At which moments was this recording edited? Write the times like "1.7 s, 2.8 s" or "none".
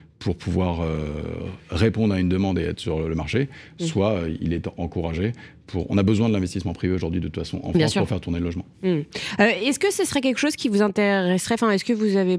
none